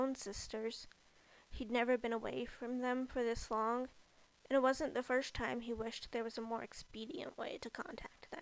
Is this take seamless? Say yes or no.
yes